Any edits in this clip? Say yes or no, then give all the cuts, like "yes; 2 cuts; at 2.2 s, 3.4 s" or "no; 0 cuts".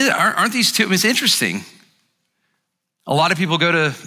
no; 0 cuts